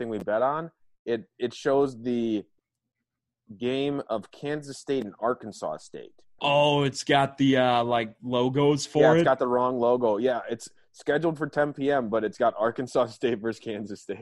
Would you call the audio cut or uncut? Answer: cut